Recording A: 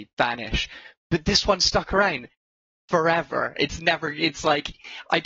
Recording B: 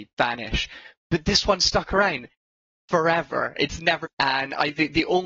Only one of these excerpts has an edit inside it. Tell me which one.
B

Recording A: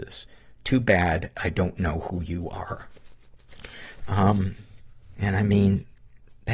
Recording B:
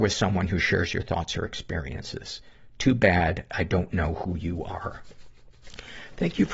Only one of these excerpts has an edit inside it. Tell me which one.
A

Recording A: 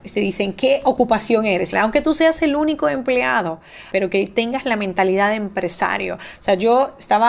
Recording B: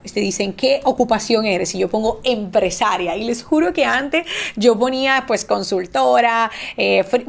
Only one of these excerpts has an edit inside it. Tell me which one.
A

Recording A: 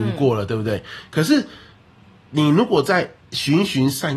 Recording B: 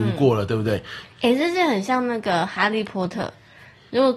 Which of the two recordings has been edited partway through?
B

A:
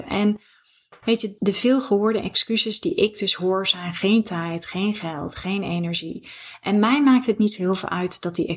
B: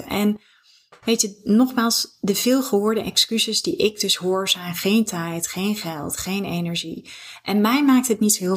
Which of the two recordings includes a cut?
A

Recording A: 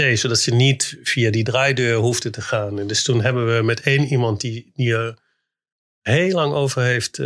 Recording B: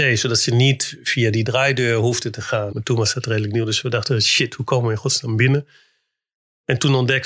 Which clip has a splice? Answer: B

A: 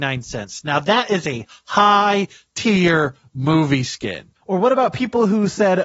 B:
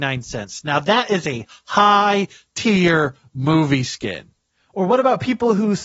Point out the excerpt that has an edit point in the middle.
A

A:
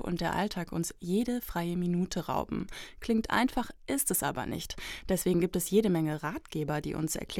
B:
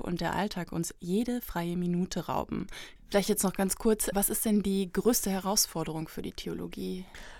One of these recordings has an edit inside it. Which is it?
B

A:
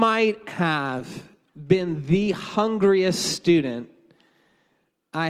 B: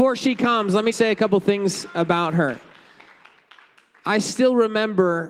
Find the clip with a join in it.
B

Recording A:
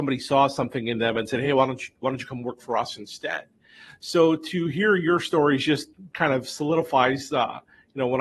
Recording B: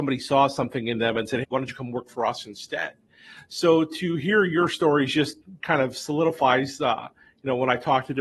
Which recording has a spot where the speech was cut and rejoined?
B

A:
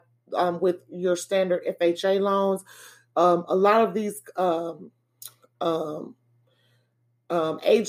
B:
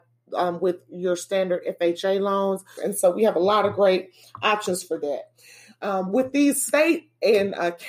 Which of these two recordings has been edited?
B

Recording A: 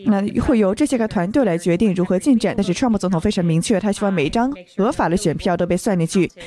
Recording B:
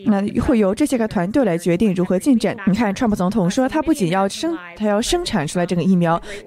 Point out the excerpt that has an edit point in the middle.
B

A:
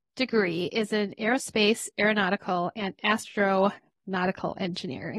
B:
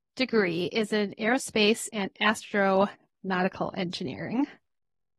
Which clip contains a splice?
B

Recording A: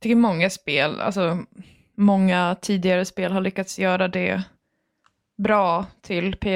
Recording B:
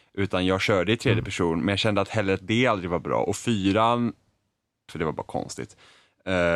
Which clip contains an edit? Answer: B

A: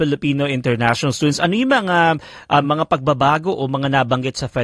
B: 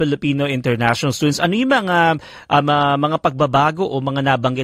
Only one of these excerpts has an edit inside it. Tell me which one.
A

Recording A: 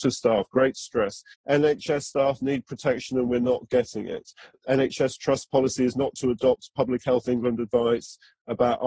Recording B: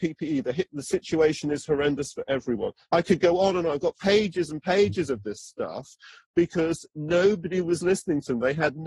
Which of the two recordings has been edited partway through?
A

